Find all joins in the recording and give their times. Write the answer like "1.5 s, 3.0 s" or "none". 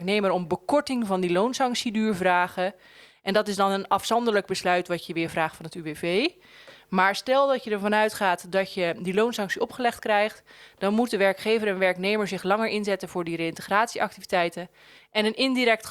none